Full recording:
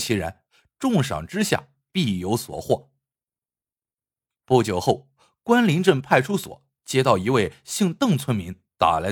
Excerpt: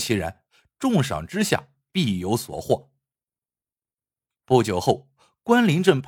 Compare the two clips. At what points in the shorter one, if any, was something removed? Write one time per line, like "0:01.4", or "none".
none